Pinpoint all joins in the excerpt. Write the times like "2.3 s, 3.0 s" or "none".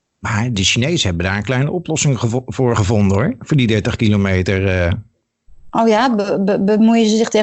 none